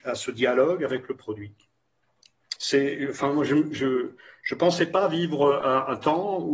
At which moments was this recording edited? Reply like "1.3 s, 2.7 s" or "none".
2.6 s